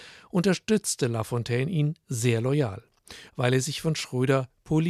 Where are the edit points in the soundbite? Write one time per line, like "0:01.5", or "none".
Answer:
0:03.3